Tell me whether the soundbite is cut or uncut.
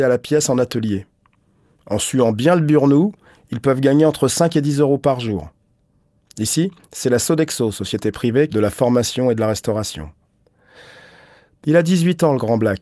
cut